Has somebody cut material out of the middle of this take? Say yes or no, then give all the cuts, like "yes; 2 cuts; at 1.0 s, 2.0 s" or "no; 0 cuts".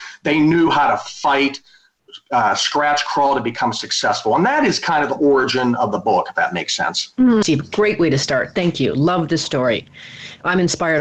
yes; 1 cut; at 7.4 s